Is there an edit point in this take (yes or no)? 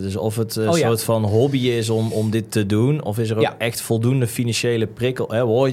no